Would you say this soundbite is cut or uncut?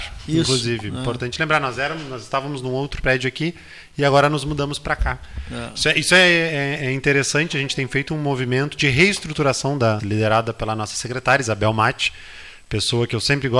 cut